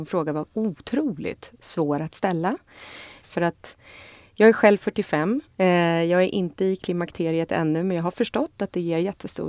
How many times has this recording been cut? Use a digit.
1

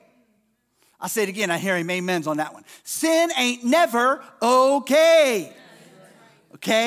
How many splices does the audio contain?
0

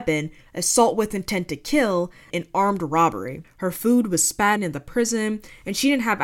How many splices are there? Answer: 3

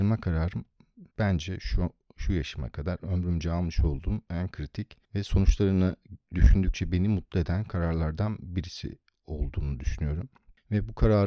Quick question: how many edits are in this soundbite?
2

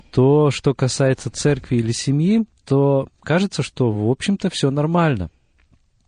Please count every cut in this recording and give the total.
0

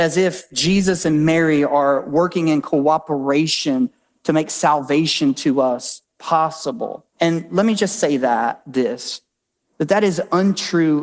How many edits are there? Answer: 1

